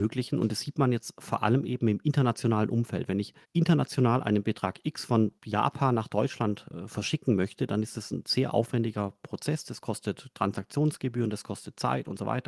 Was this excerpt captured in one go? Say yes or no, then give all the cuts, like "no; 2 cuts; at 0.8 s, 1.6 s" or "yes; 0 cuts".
no; 2 cuts; at 3.4 s, 5.4 s